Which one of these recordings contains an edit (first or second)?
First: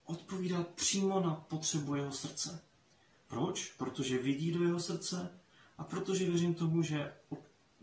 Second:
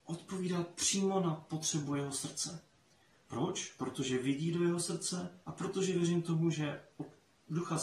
second